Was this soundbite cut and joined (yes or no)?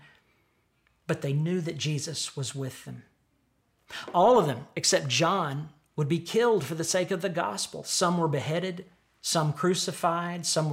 no